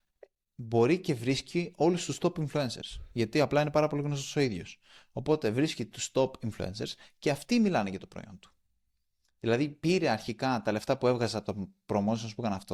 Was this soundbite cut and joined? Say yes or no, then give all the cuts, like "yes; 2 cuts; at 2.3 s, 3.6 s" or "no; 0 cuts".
no; 0 cuts